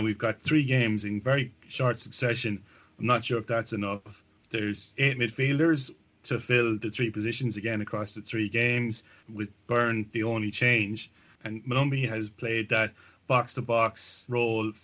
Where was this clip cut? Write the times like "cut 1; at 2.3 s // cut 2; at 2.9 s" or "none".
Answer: cut 1; at 11.4 s